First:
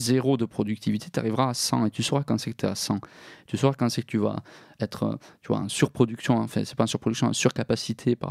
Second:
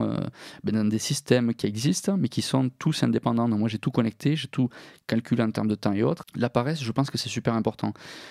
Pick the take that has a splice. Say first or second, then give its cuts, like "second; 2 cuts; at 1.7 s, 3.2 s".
second; 1 cut; at 6.2 s